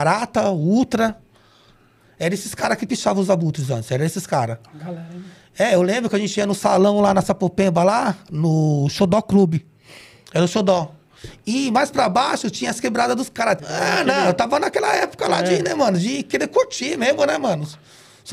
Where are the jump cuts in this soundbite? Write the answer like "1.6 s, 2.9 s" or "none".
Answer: 13.6 s